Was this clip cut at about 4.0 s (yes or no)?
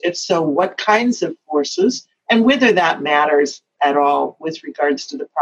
no